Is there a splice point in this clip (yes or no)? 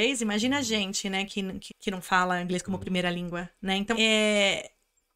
yes